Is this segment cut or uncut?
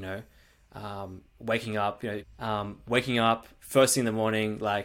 cut